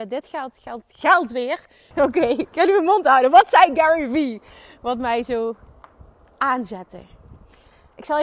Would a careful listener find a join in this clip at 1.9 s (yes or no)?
yes